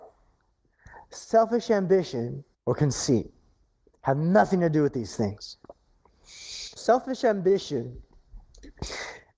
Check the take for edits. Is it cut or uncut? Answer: cut